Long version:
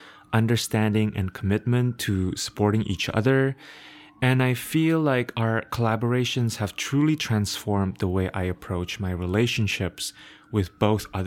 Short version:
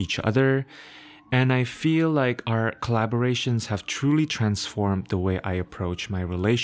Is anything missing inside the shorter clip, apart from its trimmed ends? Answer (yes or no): no